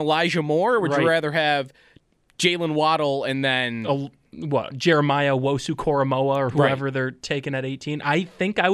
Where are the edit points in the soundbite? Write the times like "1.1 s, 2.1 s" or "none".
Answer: none